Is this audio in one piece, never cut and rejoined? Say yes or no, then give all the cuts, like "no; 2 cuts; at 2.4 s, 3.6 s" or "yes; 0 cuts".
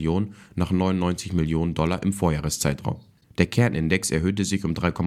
no; 1 cut; at 3.2 s